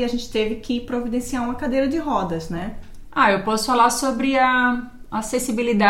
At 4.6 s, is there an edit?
no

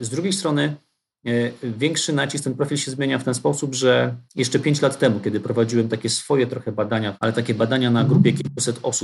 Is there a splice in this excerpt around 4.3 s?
yes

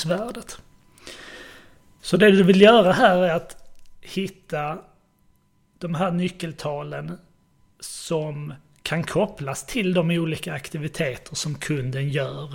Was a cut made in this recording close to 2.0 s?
yes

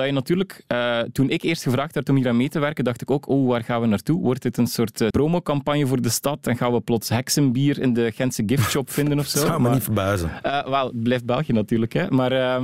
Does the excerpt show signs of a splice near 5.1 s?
yes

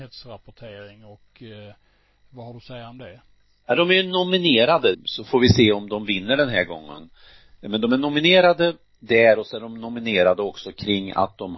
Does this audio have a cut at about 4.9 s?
yes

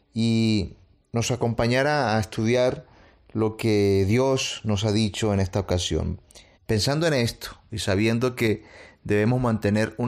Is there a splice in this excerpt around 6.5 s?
yes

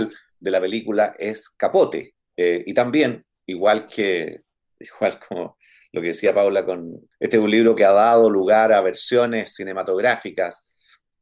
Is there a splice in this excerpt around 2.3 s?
yes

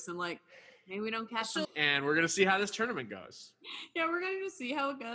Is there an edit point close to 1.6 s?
yes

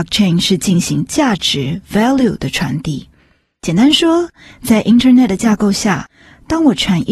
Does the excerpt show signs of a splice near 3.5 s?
no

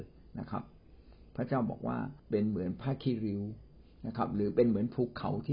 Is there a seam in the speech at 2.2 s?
yes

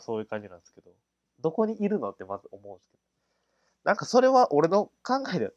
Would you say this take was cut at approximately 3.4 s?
no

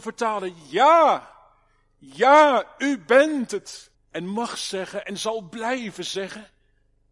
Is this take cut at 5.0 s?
yes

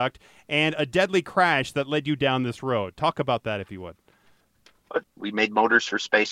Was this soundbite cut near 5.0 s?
yes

